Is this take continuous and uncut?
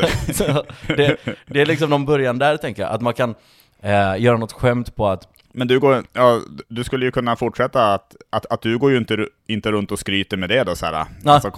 yes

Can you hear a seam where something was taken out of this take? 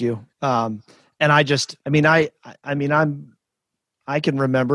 yes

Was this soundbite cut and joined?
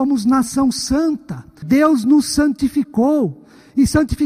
yes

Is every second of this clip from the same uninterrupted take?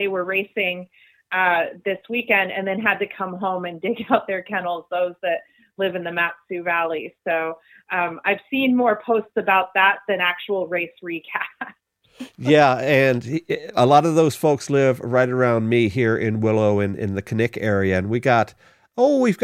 yes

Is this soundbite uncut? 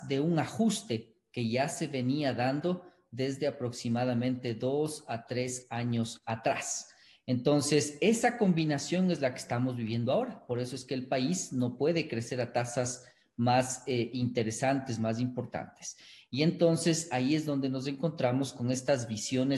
yes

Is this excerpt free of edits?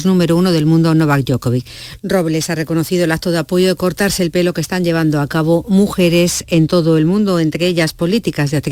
no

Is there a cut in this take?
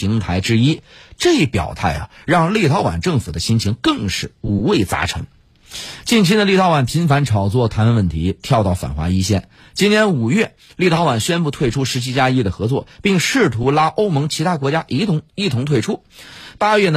no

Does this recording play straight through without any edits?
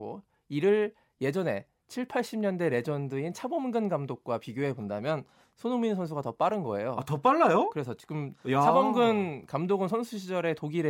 yes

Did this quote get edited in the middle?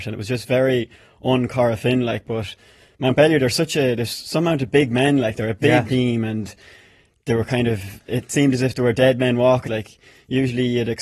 yes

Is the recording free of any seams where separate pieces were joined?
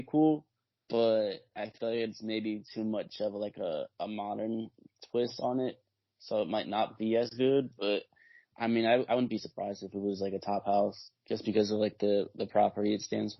yes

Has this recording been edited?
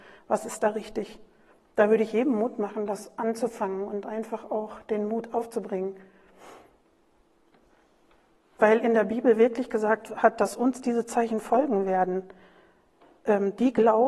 no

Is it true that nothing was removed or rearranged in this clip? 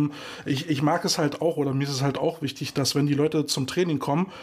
yes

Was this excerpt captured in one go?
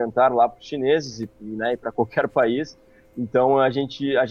yes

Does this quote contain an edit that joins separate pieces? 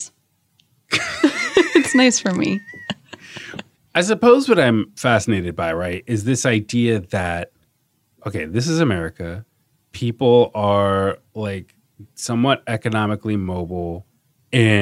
no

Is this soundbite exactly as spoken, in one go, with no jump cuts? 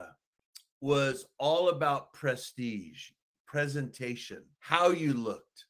no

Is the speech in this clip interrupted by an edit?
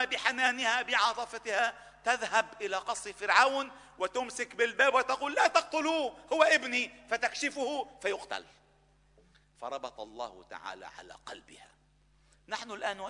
no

